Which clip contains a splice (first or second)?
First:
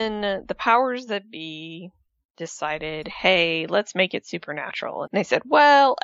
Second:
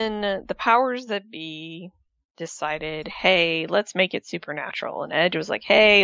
first